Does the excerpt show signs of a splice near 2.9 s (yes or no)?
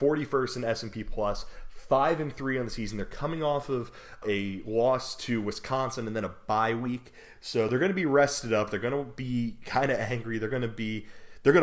no